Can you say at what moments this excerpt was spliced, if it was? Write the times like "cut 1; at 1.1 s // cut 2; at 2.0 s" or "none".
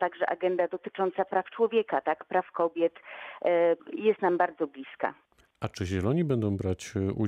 cut 1; at 3.8 s